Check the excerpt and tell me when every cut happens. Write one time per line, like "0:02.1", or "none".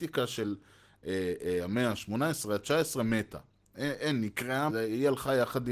0:04.7

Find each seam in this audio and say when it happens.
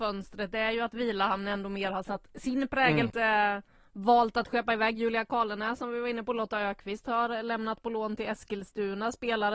0:03.1

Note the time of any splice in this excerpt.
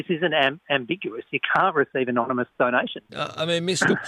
0:03.1

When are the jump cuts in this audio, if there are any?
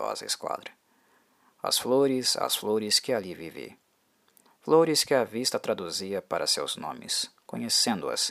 none

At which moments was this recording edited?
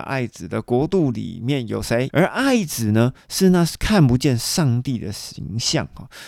0:02.1

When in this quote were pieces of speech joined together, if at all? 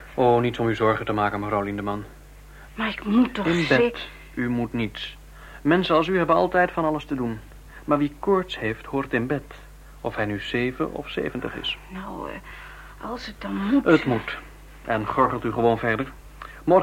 0:02.7

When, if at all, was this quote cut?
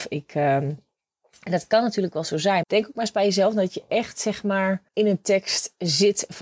0:02.6
0:04.9

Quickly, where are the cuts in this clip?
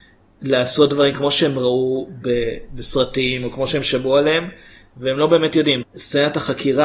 0:05.8

